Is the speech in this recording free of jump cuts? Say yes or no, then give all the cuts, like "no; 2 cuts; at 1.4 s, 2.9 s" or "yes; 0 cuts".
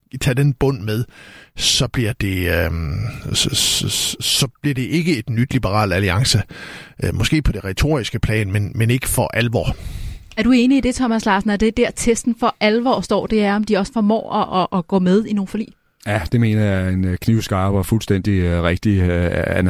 yes; 0 cuts